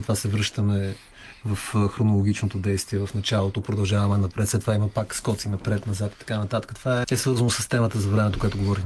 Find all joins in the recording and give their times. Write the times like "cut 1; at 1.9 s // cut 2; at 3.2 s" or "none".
cut 1; at 7.0 s